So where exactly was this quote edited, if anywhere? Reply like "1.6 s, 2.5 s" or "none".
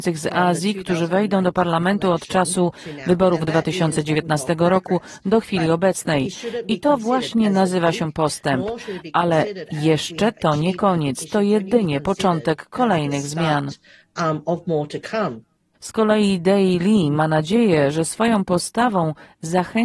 none